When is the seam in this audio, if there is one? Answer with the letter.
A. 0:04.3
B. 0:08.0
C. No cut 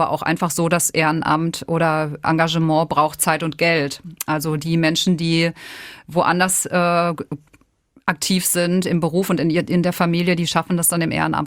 C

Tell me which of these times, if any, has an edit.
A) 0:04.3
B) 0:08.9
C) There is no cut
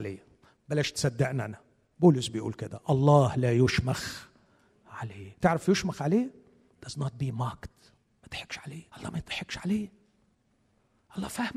B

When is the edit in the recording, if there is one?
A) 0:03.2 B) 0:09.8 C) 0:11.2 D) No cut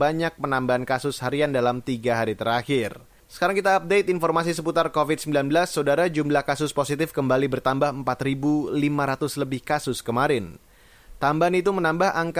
A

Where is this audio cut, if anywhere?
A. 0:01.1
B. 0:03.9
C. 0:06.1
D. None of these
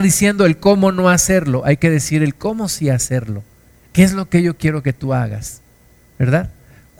B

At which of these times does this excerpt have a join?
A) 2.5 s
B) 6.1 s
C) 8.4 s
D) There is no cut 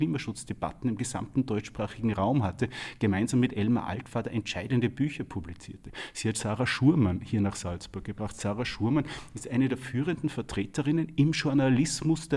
D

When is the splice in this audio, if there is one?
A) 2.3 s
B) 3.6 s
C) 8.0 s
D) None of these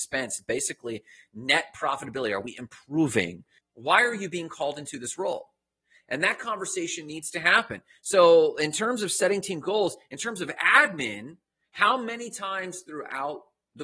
B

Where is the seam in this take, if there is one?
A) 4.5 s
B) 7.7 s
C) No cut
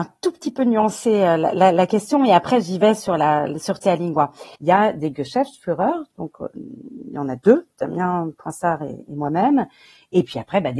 A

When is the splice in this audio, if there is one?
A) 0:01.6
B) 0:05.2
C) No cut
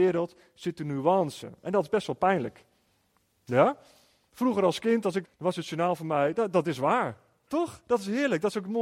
B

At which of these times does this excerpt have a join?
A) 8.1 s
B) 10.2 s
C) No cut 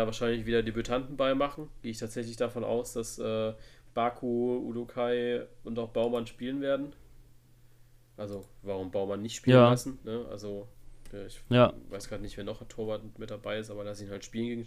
C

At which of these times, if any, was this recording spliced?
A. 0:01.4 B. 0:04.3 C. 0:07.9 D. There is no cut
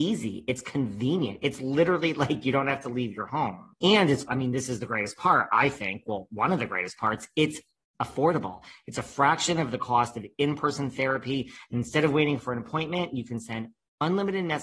B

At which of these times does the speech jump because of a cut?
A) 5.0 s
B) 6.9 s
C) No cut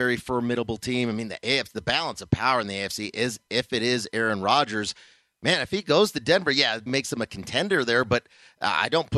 B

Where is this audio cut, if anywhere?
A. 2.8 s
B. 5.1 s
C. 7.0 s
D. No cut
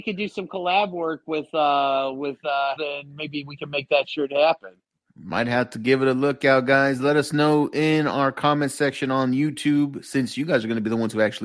A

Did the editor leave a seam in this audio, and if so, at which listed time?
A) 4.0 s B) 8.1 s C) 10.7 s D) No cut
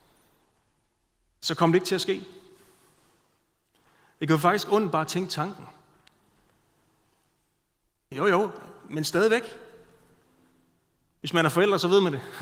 B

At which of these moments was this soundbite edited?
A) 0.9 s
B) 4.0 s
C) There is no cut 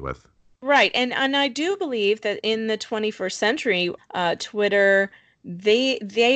B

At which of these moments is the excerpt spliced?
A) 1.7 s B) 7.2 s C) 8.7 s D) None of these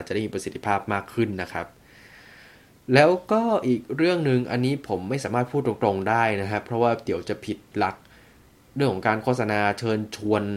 D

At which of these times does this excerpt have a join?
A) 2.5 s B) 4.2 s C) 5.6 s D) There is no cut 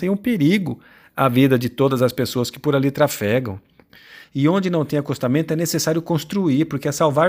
B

